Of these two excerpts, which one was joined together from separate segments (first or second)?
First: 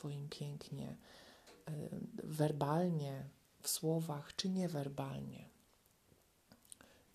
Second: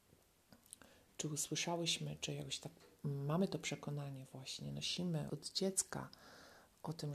second